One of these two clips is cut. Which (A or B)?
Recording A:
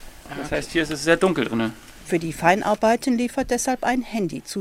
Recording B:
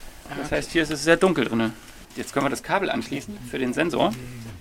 B